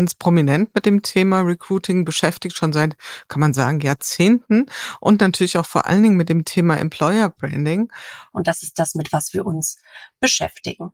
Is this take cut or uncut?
cut